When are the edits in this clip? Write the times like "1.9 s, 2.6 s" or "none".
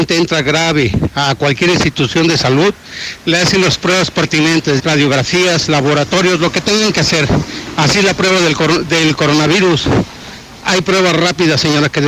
4.8 s